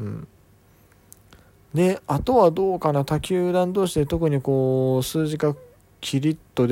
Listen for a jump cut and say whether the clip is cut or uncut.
uncut